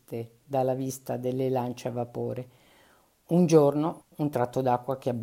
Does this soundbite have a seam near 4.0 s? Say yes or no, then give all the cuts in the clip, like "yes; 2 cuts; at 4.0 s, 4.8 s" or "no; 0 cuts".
yes; 1 cut; at 4.0 s